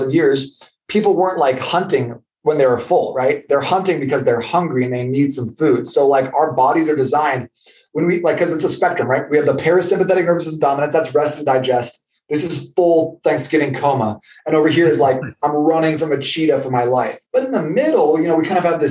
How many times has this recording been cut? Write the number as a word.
one